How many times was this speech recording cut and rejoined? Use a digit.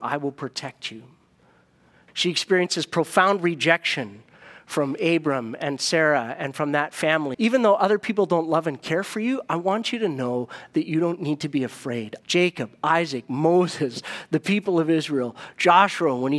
3